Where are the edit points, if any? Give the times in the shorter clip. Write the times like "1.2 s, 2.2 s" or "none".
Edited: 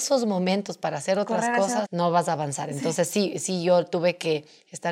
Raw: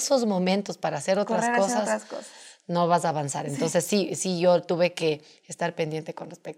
1.8 s